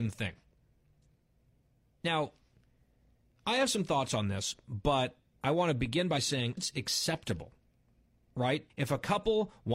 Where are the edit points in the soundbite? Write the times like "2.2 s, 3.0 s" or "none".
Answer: 6.6 s, 8.7 s

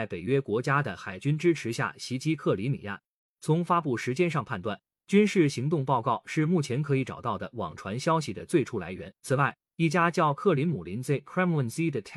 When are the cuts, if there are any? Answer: 9.2 s

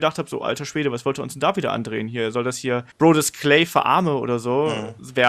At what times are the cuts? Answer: 2.9 s

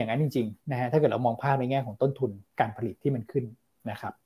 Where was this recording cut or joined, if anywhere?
none

